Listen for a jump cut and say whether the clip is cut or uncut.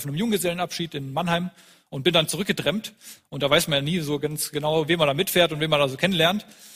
cut